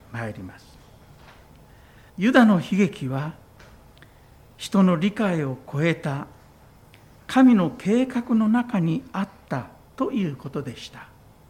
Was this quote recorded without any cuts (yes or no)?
no